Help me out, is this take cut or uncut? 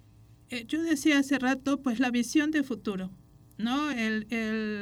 uncut